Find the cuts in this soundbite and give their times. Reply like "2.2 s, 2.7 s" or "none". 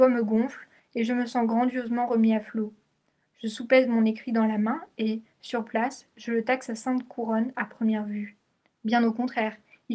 8.7 s